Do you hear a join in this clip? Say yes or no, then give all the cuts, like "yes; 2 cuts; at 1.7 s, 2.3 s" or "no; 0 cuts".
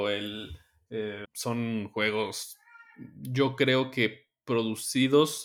yes; 1 cut; at 1.2 s